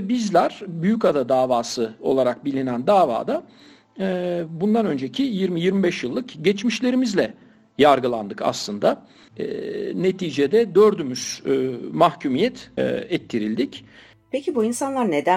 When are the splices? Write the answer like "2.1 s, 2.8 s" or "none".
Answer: 9.3 s, 12.8 s